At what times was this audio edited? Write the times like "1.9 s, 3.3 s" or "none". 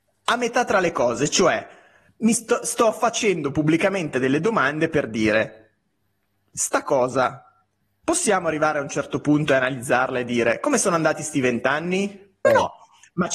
12.4 s